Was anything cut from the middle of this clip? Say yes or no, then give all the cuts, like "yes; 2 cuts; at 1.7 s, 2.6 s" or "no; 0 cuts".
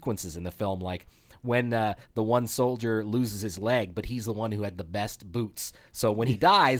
no; 0 cuts